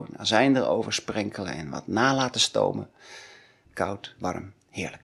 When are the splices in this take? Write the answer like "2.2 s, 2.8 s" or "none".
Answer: 3.6 s